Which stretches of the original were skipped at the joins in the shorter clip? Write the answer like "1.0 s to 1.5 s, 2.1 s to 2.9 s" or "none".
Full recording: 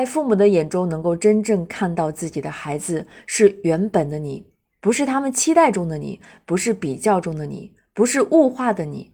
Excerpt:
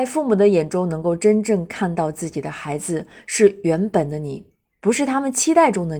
none